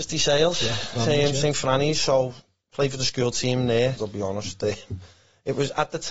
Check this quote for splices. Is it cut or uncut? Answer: cut